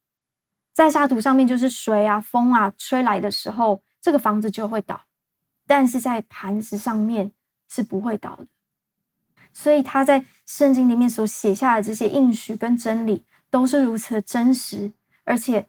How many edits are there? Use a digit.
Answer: 1